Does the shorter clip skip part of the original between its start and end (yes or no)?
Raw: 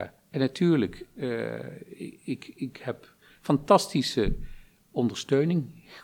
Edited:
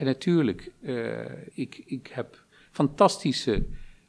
yes